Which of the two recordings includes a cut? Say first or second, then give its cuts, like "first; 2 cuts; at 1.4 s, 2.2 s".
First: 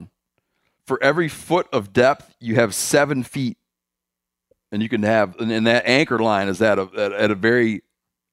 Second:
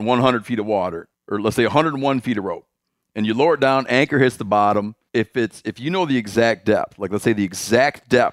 second; 2 cuts; at 1.1 s, 5.1 s